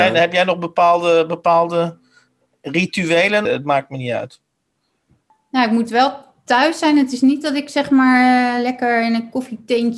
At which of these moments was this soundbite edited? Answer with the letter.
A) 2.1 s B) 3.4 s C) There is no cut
B